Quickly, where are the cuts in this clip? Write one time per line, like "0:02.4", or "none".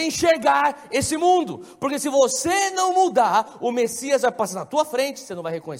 none